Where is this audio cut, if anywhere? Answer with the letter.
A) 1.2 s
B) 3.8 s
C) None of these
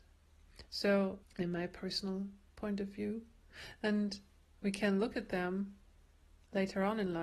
A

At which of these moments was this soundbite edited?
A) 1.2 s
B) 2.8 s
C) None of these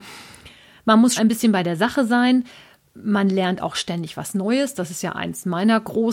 A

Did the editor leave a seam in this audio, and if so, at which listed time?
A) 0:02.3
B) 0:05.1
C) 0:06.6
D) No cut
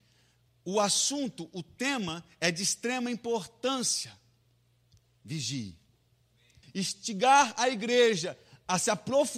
C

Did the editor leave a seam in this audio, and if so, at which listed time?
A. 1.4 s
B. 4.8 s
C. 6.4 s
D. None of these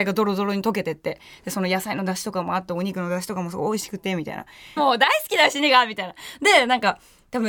B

